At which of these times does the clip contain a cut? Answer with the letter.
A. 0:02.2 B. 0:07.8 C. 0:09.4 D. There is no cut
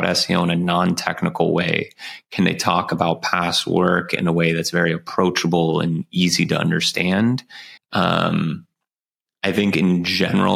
B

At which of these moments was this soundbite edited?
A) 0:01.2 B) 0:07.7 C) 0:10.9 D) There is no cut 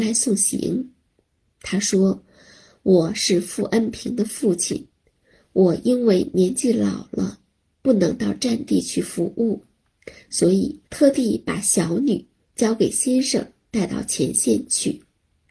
C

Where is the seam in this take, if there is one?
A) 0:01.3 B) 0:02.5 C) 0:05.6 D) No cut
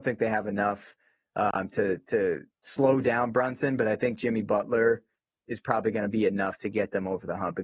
B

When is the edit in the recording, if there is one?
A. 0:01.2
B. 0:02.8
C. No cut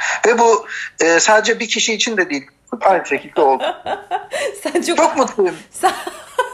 B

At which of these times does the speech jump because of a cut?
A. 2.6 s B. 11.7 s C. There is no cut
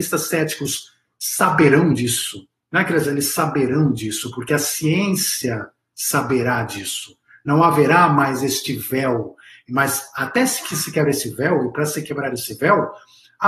C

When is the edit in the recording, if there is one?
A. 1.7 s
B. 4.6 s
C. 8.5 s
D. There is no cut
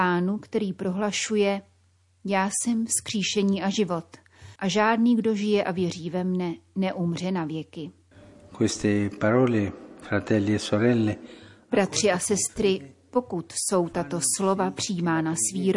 B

